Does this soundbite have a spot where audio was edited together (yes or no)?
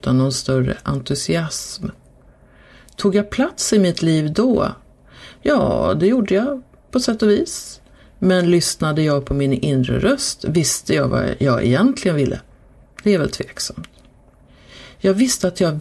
no